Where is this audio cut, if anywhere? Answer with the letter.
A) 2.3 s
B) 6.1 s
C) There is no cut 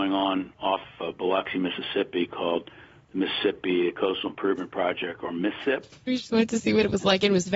B